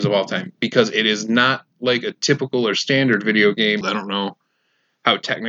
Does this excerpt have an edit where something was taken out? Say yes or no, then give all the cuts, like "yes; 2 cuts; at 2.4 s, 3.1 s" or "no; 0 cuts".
yes; 1 cut; at 3.8 s